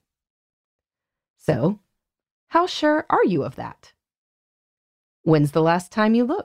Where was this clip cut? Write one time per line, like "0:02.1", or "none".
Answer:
none